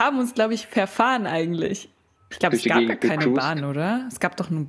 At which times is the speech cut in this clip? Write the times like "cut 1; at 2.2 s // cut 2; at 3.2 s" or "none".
cut 1; at 2.3 s